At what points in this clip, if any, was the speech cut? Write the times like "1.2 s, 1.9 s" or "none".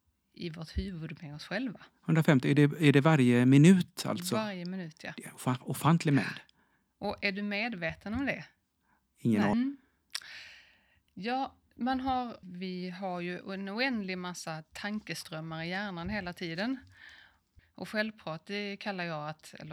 9.5 s, 12.4 s, 17.6 s